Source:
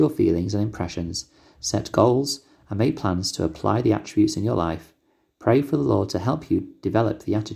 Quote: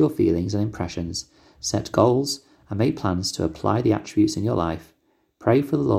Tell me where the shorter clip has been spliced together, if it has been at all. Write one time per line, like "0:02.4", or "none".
none

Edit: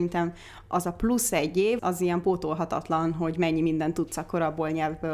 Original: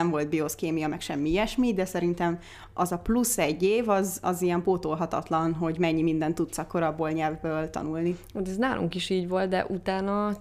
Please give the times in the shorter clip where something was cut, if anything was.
0:01.8

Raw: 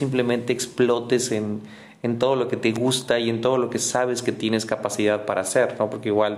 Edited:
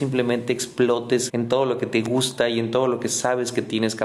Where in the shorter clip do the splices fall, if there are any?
0:01.3

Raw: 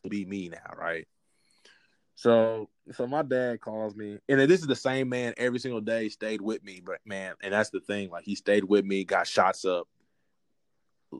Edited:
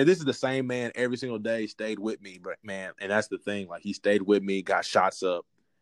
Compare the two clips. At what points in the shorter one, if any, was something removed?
none

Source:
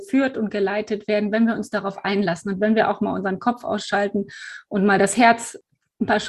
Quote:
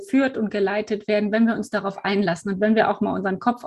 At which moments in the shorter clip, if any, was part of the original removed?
none

